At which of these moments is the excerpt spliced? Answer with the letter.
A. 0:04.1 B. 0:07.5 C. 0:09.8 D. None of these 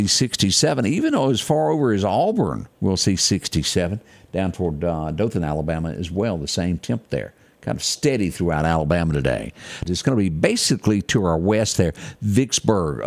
C